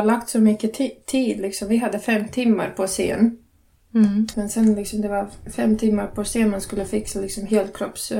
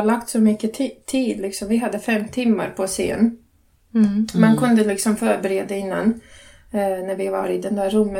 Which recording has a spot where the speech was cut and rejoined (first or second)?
first